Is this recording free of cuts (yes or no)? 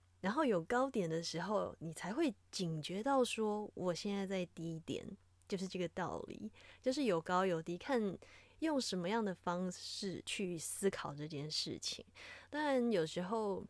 yes